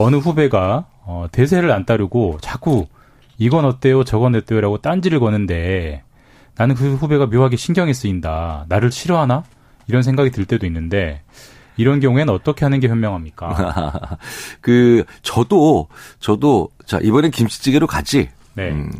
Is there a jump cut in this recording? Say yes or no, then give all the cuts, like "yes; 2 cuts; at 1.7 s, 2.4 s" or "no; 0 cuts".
no; 0 cuts